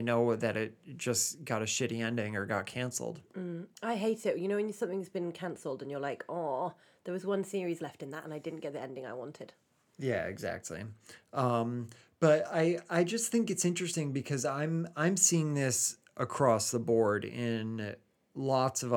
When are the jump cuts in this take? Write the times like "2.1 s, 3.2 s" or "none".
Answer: none